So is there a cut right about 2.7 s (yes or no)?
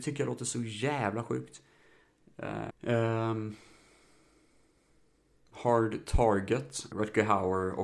yes